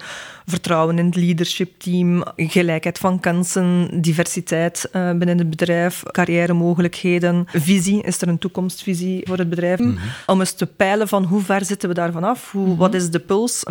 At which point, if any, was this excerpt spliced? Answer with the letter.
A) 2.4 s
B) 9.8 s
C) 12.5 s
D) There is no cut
B